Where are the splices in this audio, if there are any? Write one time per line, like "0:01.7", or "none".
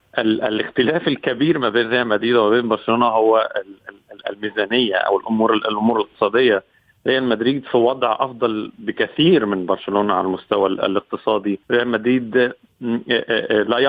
0:11.6